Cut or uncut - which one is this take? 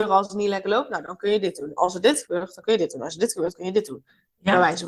uncut